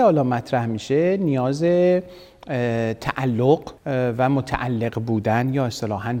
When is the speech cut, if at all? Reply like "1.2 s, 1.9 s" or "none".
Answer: 3.8 s

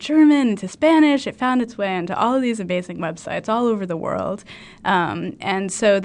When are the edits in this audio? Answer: none

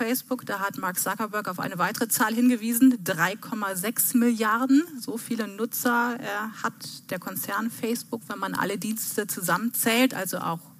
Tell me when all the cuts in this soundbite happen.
none

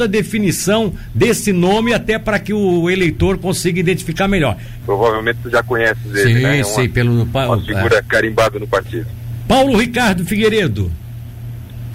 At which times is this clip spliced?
4.8 s

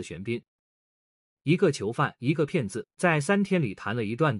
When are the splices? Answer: 2.9 s

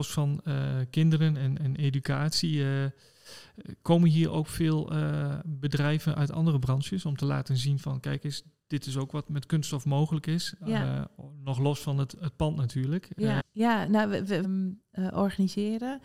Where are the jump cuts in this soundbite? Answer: 13.4 s, 14.4 s

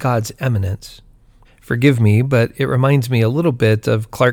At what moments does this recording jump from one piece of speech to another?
1.4 s

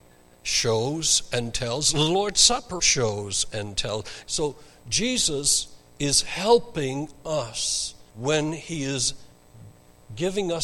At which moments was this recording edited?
2.8 s, 4.3 s, 8.1 s

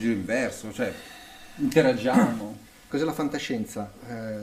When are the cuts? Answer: 2.9 s

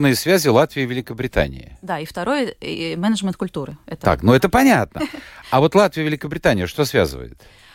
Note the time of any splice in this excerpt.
none

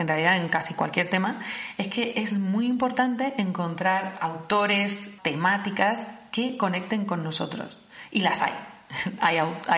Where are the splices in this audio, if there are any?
5.2 s

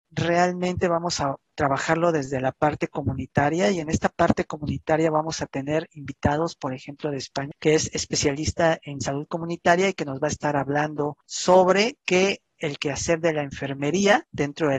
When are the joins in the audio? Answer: 3.8 s, 7.5 s

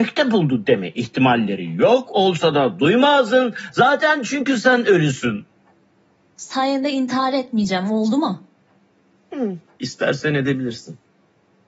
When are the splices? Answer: 6.3 s

